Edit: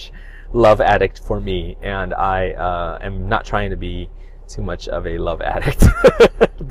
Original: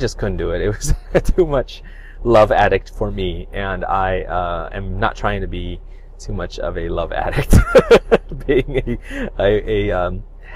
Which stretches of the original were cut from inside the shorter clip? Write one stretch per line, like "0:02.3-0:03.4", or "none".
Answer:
none